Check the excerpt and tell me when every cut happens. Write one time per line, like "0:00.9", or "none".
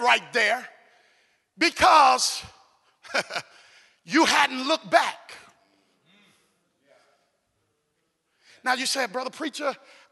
none